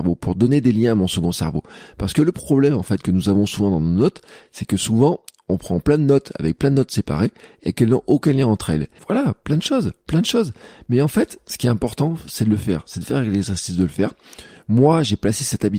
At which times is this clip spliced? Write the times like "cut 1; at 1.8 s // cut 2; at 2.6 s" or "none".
cut 1; at 9.0 s